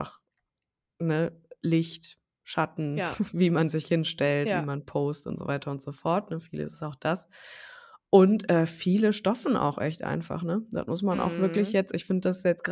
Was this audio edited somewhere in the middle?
no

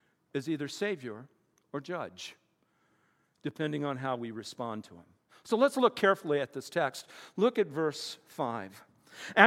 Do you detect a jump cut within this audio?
no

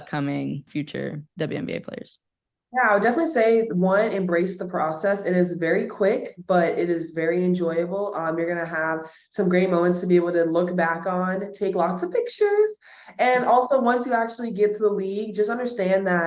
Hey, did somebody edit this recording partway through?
no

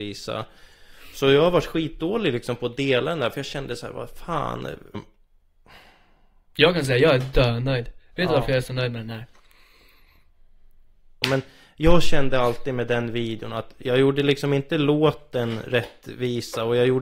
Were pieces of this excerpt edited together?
yes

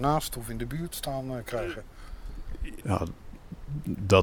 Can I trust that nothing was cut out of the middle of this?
no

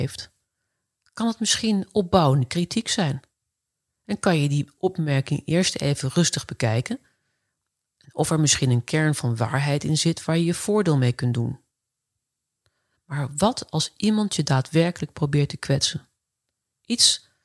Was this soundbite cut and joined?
no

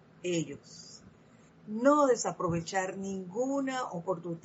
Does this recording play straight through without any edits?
no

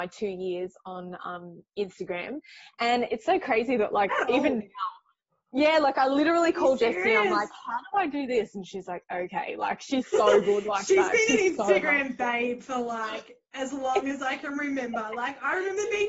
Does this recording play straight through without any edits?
yes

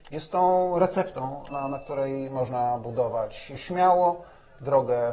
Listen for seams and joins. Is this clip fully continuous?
no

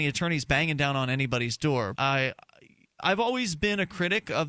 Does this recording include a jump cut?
yes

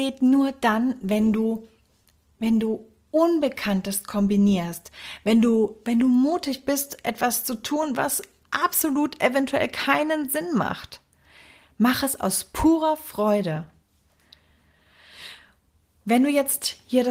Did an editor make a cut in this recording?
no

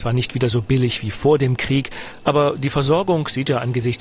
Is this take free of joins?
yes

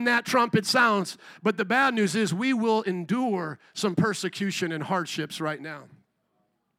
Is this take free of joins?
yes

